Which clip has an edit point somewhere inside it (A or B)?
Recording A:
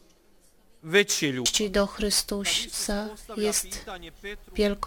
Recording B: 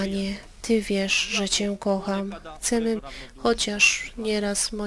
B